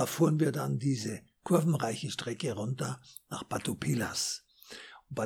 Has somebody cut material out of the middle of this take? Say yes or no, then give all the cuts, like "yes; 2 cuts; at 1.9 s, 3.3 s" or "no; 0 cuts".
no; 0 cuts